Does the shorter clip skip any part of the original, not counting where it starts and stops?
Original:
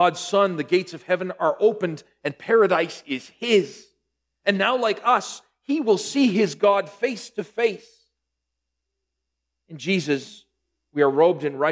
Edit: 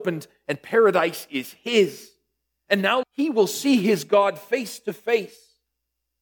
yes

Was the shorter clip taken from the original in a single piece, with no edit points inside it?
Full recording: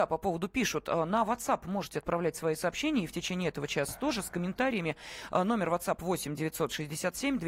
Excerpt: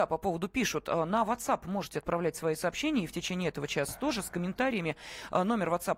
yes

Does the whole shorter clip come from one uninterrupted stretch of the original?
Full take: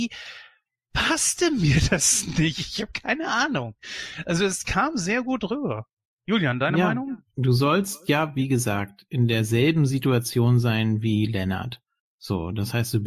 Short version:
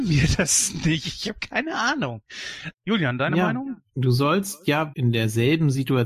no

